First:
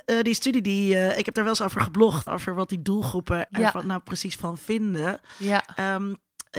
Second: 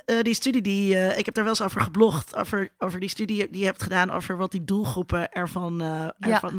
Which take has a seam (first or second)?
first